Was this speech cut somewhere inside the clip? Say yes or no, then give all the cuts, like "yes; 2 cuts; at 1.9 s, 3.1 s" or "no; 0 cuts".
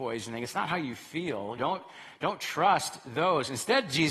yes; 1 cut; at 1.6 s